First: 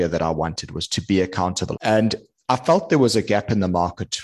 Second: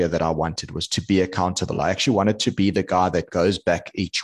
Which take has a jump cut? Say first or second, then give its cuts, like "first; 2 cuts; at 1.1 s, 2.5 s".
first; 1 cut; at 1.7 s